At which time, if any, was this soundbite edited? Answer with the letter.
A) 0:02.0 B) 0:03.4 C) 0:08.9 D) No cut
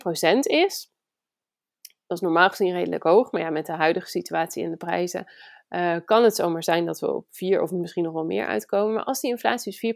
D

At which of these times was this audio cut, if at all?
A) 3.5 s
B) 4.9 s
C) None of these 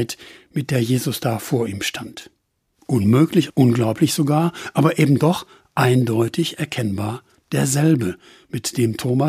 A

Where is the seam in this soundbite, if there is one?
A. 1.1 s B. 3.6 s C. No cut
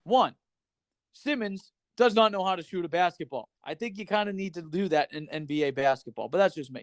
B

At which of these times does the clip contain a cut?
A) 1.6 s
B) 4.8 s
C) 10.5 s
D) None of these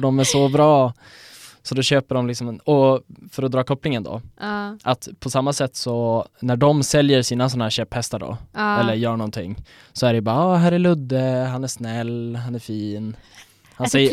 D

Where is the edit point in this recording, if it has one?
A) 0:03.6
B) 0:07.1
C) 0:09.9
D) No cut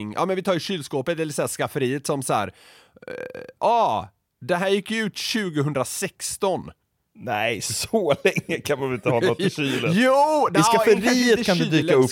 D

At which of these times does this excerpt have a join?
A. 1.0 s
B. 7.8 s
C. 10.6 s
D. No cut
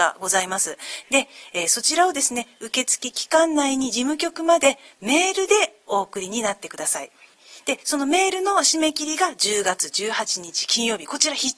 A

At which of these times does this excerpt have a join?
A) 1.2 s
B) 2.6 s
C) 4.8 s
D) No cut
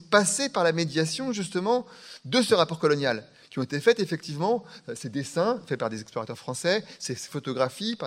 D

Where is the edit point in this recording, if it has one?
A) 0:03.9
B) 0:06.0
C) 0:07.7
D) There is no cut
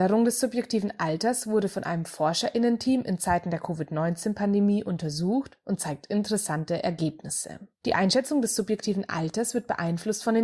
C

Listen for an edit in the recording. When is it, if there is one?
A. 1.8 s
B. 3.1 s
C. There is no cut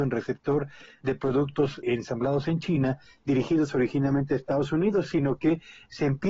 A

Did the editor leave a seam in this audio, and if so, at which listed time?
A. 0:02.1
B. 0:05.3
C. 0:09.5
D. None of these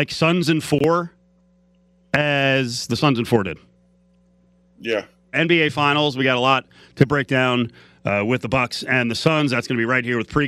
B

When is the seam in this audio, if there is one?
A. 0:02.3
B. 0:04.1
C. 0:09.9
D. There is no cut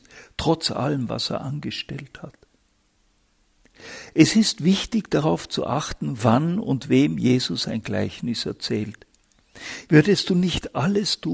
C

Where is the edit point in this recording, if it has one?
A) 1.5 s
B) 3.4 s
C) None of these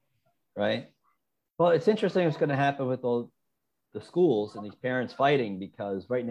A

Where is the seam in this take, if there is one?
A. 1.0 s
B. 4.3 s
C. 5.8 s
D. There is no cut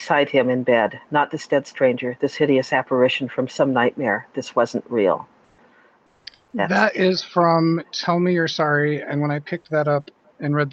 D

